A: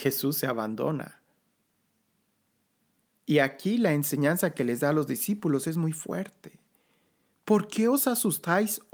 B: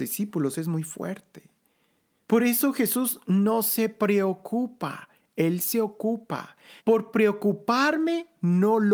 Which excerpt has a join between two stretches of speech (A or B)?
B